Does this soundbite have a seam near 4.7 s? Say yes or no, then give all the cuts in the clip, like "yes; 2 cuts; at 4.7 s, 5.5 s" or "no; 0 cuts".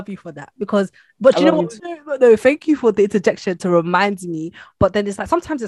no; 1 cut; at 1.8 s